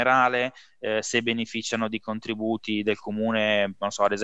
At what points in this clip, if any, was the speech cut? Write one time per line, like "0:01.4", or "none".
none